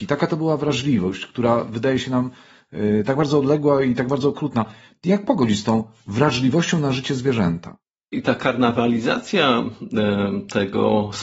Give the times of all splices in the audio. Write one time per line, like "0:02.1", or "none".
0:08.1